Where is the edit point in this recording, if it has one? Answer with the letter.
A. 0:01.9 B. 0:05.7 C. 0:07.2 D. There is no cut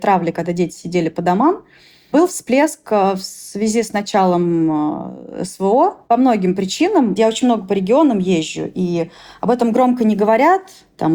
C